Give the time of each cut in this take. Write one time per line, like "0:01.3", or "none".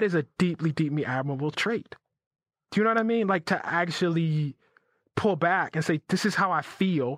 none